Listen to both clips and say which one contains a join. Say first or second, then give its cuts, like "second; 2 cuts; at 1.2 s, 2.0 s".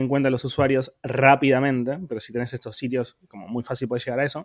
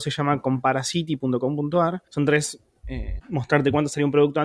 second; 2 cuts; at 2.1 s, 3.2 s